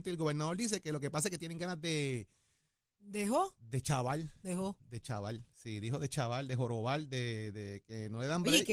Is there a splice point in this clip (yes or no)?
no